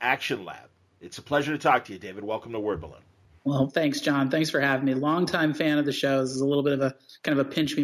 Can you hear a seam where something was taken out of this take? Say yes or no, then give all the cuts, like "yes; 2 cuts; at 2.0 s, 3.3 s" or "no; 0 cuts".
no; 0 cuts